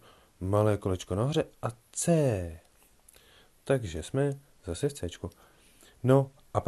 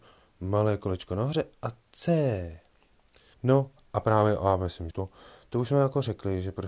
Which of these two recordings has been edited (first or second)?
second